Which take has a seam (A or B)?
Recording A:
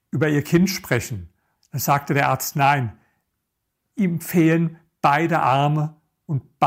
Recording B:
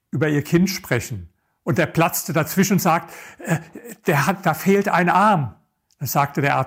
A